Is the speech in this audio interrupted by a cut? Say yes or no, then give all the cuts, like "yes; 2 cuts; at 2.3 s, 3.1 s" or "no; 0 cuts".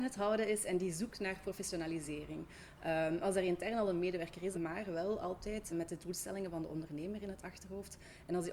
yes; 2 cuts; at 4.5 s, 5.7 s